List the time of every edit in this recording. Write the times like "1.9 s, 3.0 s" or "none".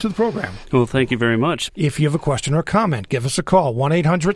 1.7 s